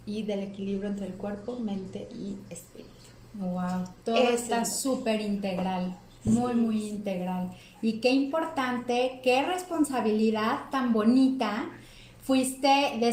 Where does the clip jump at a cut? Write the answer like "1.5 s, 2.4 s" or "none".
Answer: none